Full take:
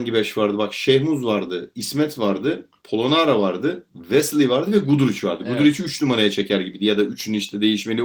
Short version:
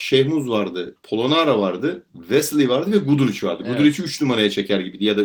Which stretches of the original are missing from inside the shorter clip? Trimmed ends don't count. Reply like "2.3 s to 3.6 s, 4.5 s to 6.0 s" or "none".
1.7 s to 2.8 s